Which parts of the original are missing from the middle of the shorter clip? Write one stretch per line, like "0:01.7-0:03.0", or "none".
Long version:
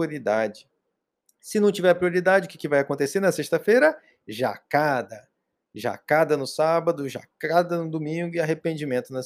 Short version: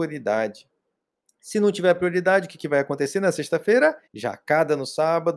0:04.1-0:05.7